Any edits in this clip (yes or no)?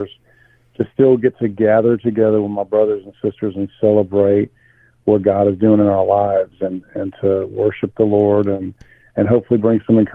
no